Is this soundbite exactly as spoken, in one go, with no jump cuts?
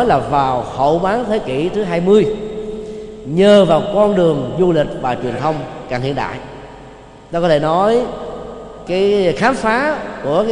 no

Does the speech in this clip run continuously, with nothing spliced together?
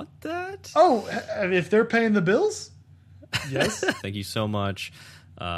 no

